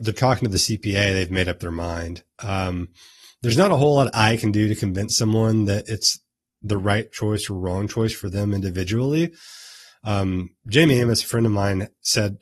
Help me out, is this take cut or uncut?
uncut